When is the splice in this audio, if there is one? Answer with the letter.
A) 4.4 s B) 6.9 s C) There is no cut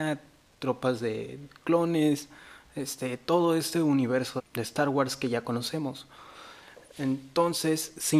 A